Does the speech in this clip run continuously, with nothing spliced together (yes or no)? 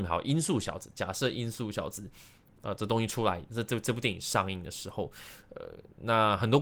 yes